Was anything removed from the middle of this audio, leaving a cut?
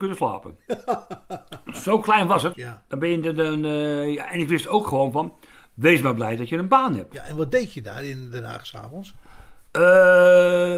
yes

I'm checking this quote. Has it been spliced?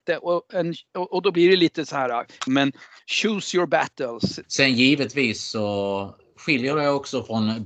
yes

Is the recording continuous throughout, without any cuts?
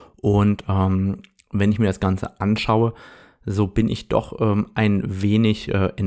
yes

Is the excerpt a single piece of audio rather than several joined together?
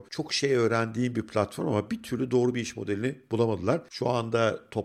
no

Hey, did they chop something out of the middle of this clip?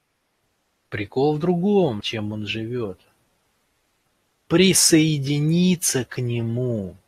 yes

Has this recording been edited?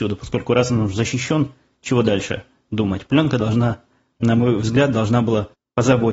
no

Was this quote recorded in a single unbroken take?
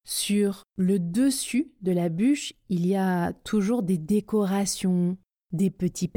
yes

